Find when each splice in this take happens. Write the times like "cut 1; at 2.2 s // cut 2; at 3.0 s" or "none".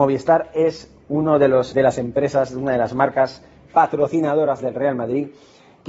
cut 1; at 1.7 s